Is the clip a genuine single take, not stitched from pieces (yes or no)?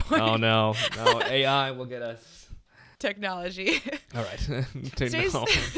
no